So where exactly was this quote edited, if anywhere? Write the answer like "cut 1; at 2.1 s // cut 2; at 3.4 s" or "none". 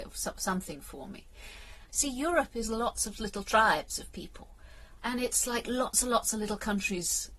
cut 1; at 1.9 s // cut 2; at 5.0 s